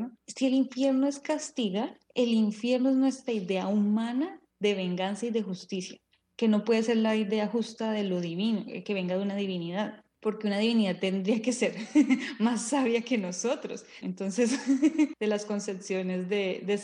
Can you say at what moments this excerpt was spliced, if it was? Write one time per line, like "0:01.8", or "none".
0:14.0
0:15.1